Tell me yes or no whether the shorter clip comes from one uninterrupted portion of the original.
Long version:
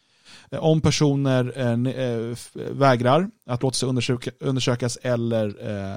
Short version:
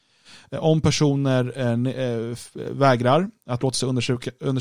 yes